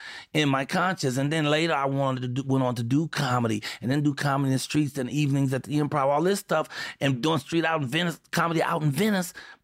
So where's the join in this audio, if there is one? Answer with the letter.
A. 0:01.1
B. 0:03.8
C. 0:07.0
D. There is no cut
D